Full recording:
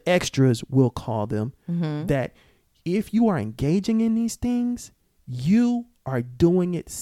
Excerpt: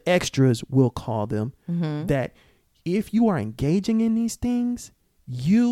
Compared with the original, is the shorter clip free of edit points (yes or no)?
yes